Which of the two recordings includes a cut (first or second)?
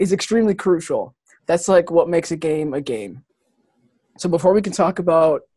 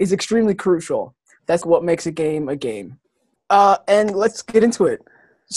second